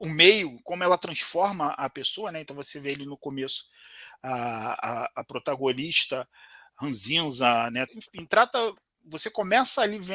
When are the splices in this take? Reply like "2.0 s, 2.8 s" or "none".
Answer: 7.9 s

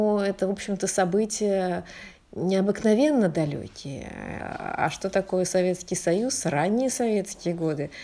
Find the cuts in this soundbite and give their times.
4.4 s

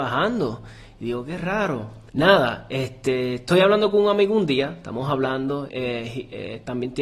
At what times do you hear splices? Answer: 2.1 s, 5.7 s

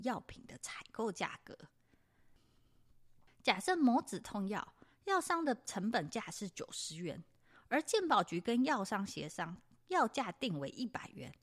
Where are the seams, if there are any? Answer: none

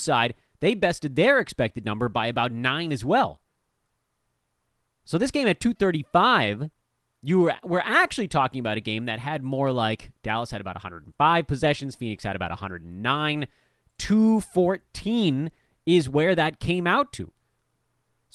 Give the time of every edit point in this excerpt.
none

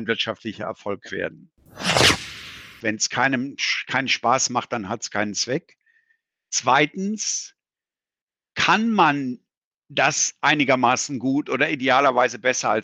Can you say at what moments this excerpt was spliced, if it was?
2.8 s

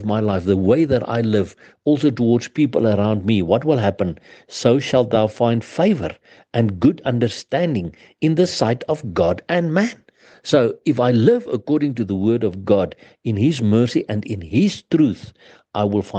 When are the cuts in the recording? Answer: none

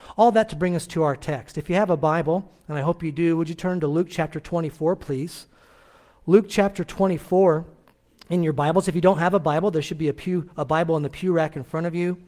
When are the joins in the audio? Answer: none

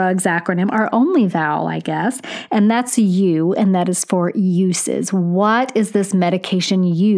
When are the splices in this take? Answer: none

